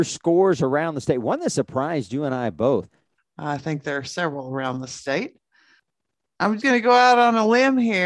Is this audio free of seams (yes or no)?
no